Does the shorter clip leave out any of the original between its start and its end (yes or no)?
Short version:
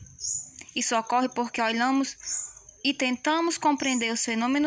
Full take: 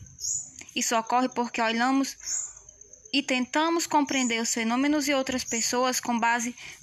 yes